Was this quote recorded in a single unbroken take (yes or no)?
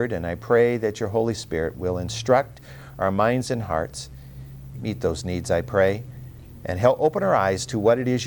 no